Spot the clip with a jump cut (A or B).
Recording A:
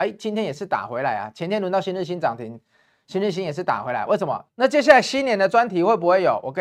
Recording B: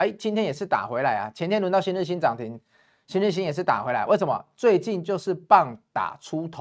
A